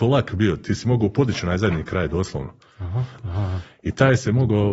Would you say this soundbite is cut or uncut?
cut